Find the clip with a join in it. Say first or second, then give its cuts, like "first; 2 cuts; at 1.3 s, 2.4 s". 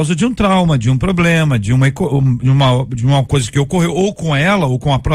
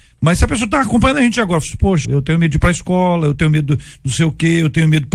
second; 1 cut; at 2.0 s